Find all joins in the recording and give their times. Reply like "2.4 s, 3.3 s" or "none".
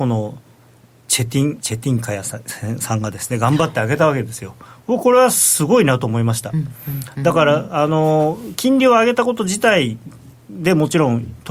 none

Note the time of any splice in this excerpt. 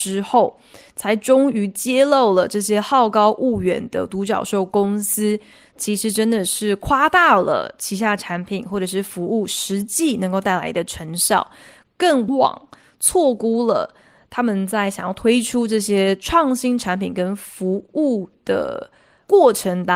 12.3 s

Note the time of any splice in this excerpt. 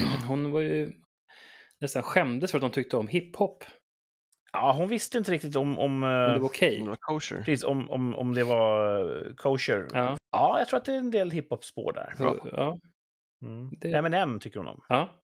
10.2 s

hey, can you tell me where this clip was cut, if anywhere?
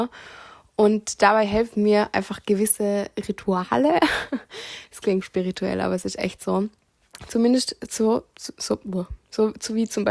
5.2 s

